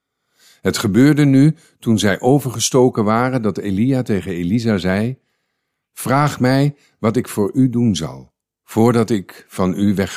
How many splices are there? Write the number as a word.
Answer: zero